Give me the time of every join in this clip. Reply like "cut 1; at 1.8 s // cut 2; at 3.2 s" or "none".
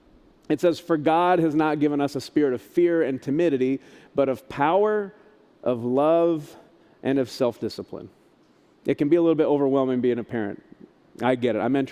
none